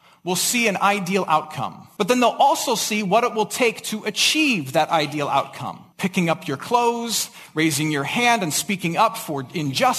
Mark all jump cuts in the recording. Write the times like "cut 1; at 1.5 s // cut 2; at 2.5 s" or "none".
cut 1; at 2.0 s // cut 2; at 5.9 s